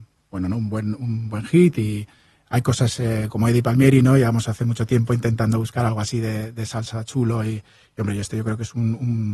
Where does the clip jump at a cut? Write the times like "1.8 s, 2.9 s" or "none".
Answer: none